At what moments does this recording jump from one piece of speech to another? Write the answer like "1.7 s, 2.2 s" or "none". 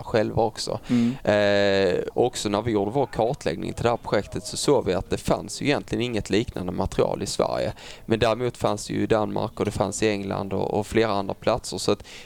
2.1 s